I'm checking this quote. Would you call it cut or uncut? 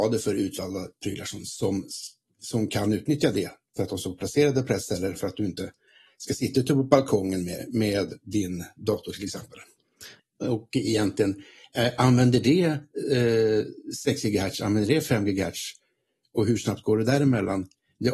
cut